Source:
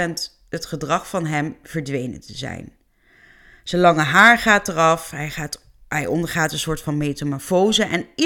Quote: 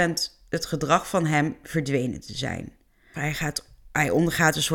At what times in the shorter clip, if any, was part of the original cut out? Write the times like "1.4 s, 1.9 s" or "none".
3.1 s